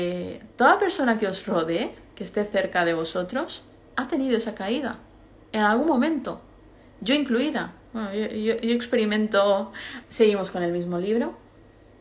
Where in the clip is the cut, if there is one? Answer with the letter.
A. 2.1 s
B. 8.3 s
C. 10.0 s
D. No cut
C